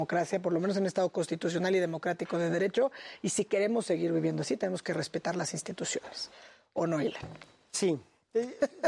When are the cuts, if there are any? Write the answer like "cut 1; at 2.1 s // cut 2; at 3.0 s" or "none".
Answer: none

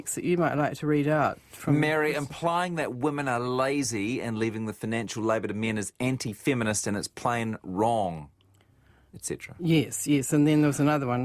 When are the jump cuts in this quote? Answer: none

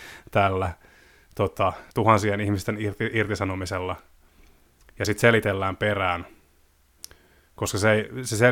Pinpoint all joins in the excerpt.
cut 1; at 1.9 s

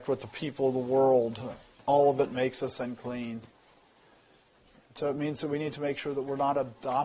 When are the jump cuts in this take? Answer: none

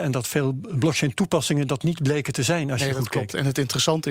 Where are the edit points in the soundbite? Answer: none

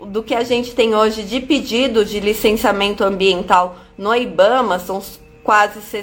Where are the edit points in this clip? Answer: none

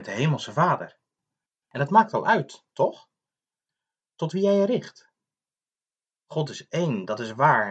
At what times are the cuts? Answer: none

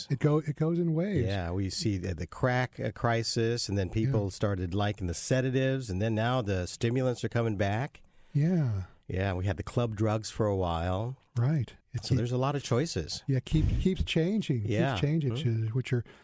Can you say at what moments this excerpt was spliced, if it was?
cut 1; at 11.8 s // cut 2; at 15.3 s

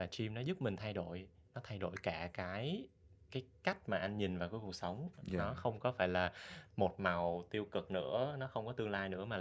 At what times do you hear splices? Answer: none

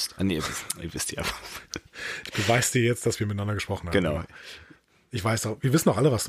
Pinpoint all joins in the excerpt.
none

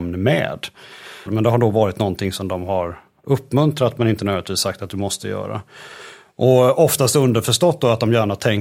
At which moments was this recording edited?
cut 1; at 1.3 s

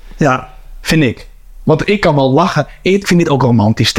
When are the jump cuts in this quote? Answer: cut 1; at 3.0 s

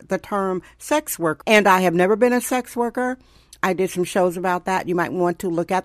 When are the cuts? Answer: cut 1; at 1.4 s

